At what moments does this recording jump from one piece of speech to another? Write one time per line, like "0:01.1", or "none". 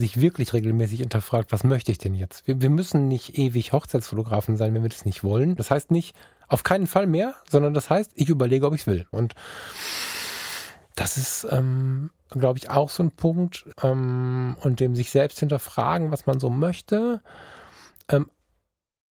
0:05.6
0:09.1
0:13.7